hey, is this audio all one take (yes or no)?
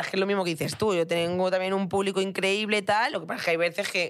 yes